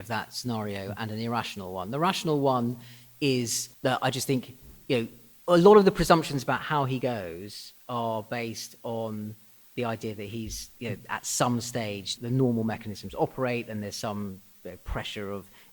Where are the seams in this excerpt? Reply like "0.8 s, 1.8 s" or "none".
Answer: 3.7 s, 12.2 s